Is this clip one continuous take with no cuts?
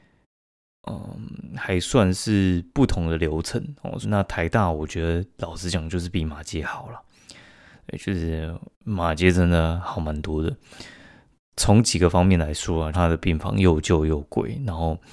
no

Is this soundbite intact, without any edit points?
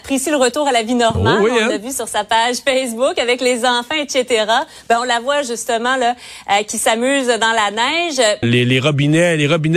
no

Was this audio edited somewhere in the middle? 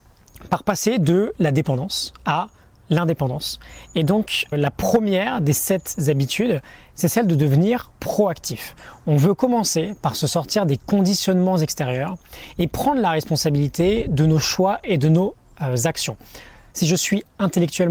yes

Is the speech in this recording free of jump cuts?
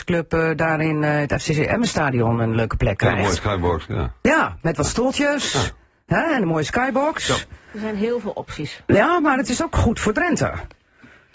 yes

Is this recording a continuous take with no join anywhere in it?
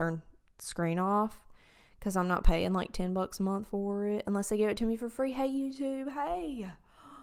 yes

